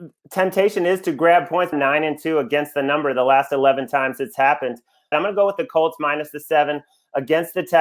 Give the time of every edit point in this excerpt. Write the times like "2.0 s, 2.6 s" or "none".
1.7 s, 5.1 s